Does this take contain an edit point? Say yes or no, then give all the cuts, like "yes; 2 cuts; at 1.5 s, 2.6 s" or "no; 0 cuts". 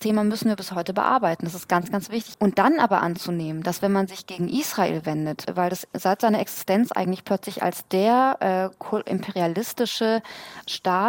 yes; 1 cut; at 2.3 s